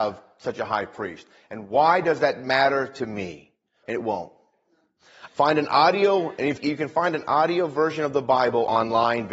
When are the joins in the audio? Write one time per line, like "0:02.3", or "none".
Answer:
0:03.8
0:05.3
0:06.6